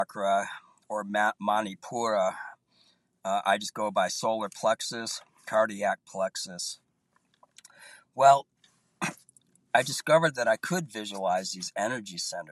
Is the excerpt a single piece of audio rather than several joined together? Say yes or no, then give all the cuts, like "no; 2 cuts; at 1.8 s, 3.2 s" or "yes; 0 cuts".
yes; 0 cuts